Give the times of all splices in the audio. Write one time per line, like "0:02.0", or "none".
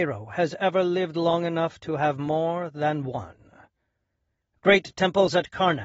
0:04.5